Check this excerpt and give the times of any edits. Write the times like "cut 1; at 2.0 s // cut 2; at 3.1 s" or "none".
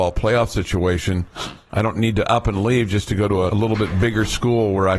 cut 1; at 1.7 s // cut 2; at 3.5 s